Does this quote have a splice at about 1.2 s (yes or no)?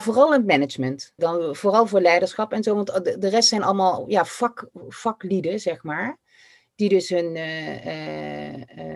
yes